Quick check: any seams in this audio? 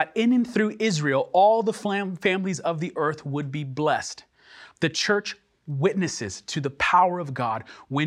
no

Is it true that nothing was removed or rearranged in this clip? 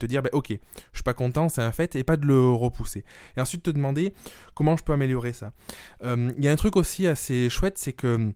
yes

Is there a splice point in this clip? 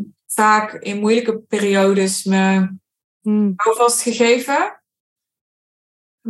no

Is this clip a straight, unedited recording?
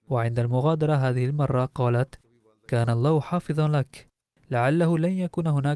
yes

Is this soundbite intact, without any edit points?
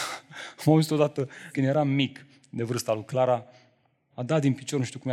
no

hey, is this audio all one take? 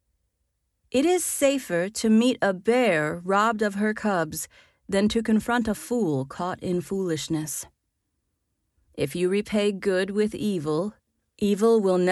yes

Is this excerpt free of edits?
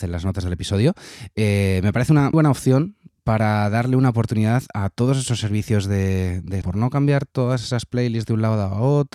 no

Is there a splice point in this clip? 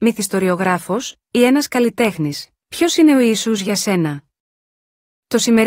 no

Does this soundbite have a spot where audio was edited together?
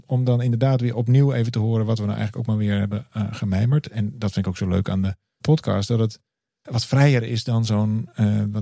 no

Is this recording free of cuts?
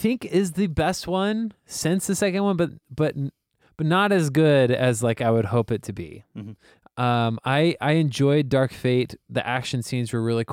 yes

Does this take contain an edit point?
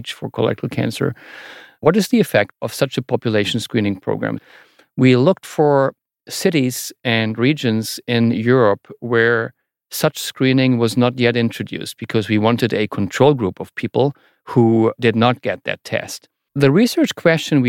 yes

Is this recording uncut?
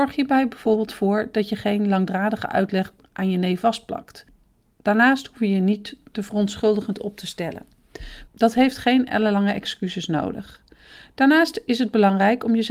no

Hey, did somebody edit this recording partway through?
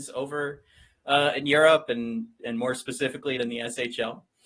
yes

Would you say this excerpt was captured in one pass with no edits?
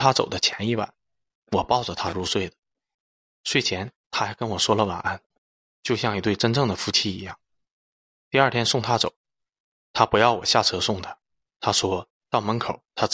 yes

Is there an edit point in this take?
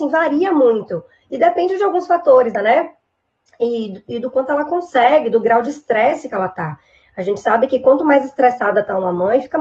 yes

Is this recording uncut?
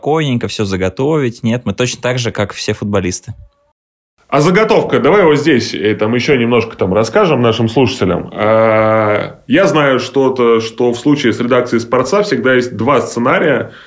no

